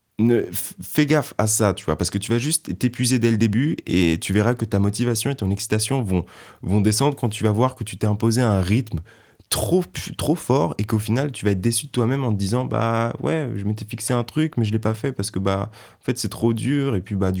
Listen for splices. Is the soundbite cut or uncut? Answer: uncut